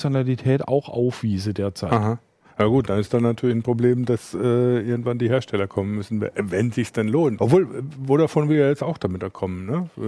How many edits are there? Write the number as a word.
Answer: one